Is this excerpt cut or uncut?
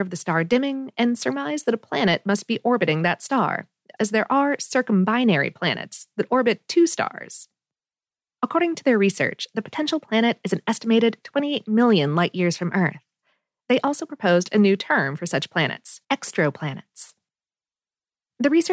cut